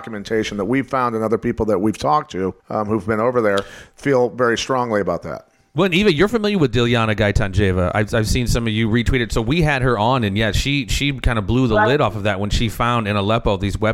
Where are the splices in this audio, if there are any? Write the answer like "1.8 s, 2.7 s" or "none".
2.6 s